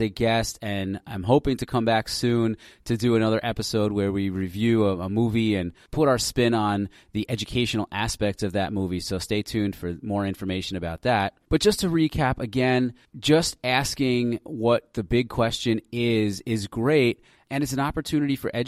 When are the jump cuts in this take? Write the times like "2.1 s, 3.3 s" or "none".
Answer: none

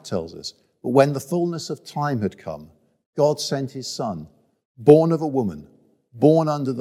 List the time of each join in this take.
none

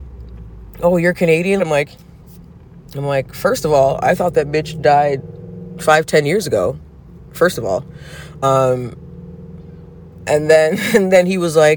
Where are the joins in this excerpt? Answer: 1.6 s

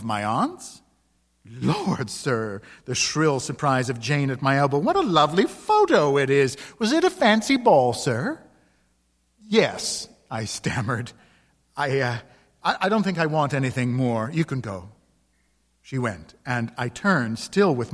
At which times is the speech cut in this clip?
none

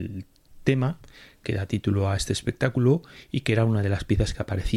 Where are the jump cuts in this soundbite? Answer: none

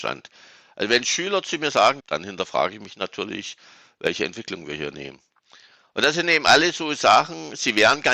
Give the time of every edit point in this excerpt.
2.0 s

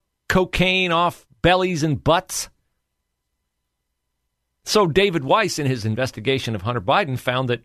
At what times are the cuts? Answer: none

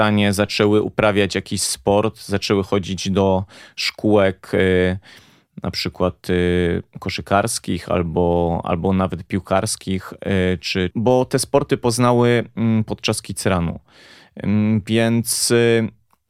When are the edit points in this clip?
10.9 s

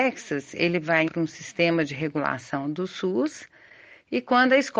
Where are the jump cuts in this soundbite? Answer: 1.1 s

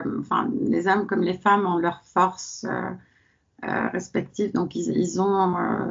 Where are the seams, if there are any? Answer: none

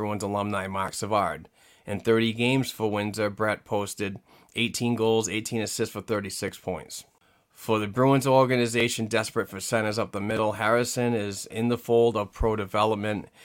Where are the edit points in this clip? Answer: 11.5 s

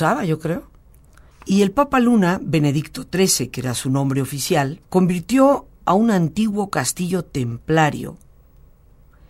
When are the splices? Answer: 1.3 s, 4.9 s

